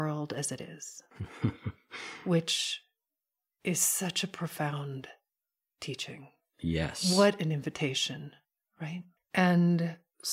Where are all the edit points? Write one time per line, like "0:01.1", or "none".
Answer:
0:09.2